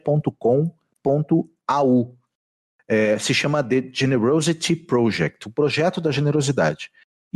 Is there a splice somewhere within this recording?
no; 0 cuts

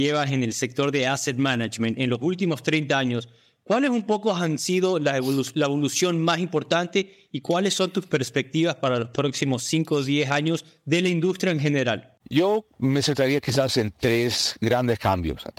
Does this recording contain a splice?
yes; 1 cut; at 12.2 s

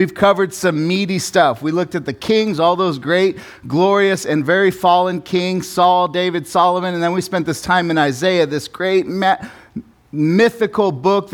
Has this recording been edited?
no; 0 cuts

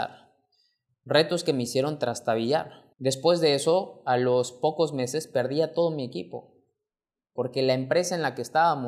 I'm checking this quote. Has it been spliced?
yes; 1 cut; at 2.9 s

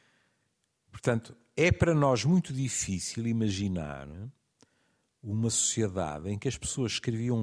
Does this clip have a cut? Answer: no; 0 cuts

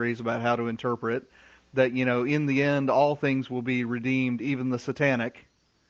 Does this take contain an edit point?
no; 0 cuts

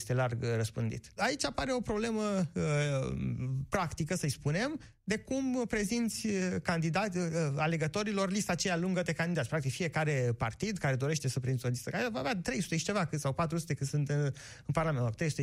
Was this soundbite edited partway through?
yes; 1 cut; at 1.2 s

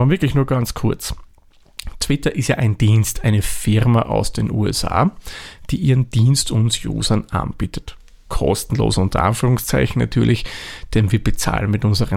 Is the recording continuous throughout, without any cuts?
yes; 0 cuts

